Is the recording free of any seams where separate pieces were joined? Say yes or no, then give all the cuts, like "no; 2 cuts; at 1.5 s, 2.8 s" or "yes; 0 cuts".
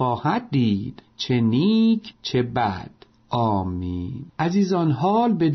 no; 1 cut; at 4.3 s